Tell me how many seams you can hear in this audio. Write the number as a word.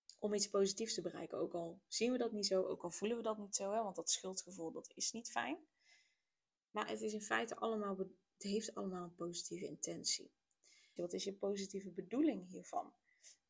one